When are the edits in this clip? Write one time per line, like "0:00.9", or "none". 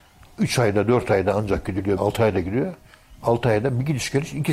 0:02.0